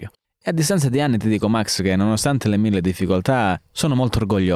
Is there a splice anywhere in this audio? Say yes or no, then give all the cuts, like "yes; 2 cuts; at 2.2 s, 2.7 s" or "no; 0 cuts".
no; 0 cuts